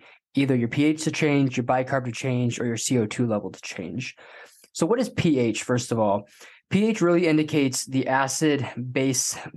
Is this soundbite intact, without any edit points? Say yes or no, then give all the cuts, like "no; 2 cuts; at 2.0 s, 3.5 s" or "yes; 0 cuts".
yes; 0 cuts